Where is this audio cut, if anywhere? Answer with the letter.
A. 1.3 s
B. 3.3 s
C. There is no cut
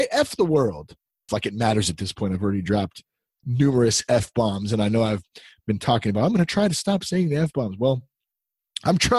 A